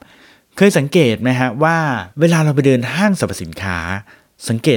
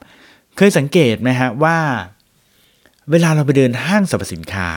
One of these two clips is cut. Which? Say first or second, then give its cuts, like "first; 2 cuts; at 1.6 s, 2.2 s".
first; 1 cut; at 2.1 s